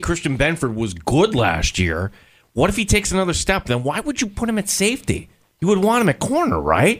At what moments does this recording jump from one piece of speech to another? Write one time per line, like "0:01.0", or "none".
none

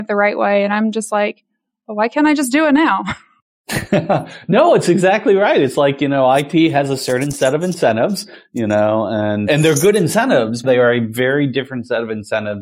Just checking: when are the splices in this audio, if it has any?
0:09.5
0:10.6

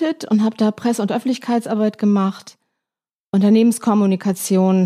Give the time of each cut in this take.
none

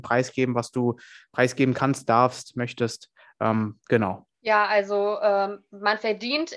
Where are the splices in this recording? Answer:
0:04.3

